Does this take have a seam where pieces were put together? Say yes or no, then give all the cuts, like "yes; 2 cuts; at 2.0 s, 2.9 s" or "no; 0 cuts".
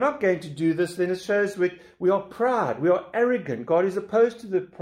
no; 0 cuts